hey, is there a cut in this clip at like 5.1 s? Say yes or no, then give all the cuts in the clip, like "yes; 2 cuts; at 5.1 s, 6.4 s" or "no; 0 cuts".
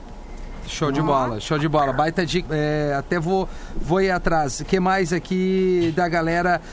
no; 1 cut; at 2.5 s